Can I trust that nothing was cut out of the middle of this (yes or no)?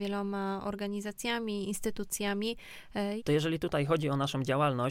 no